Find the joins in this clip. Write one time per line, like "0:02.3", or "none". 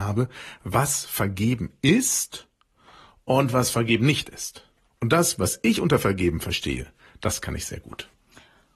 none